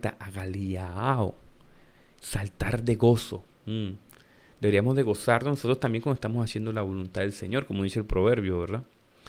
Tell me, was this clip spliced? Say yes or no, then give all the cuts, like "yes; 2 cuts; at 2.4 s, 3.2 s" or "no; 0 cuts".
yes; 1 cut; at 3.5 s